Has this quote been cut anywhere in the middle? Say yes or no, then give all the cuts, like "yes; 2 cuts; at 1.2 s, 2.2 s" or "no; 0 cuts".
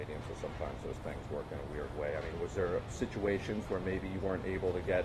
no; 0 cuts